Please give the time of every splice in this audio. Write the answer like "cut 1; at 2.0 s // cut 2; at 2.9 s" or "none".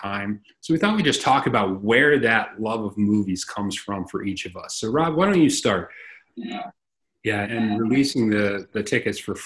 cut 1; at 6.3 s // cut 2; at 7.4 s